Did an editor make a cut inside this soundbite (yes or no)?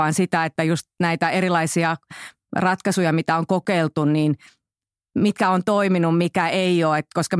no